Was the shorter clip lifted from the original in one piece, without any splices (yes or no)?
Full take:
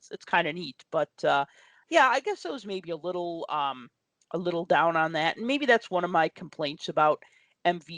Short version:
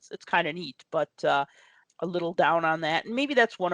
no